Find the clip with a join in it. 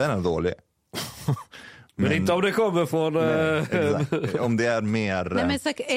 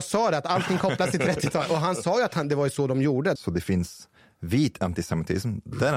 second; 1 cut; at 3.4 s

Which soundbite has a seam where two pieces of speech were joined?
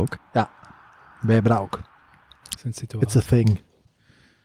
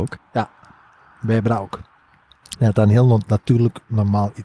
first; 1 cut; at 2.6 s

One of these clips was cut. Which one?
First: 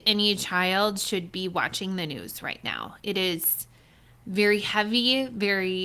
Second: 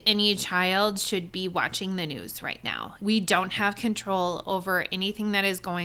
second; 1 cut; at 3.0 s

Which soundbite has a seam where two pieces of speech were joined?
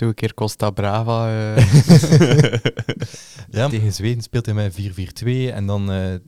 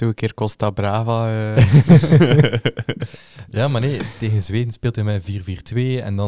first; 1 cut; at 3.7 s

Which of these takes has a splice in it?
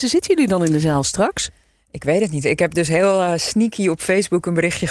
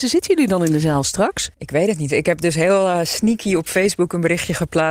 second; 1 cut; at 1.5 s

